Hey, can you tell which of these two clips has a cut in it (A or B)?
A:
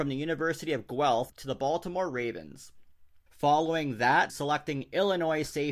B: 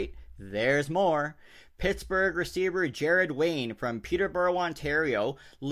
A